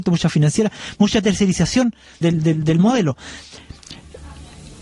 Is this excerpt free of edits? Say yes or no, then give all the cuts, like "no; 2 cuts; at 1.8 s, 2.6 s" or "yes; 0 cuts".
no; 1 cut; at 2.2 s